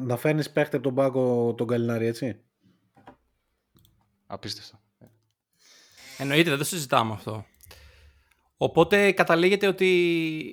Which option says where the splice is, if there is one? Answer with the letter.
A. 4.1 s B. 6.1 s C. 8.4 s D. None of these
D